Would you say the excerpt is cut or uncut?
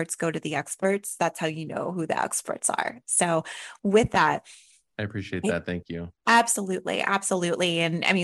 uncut